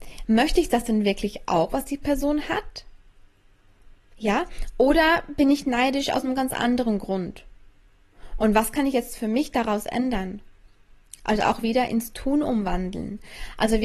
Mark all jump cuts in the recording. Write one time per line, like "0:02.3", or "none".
none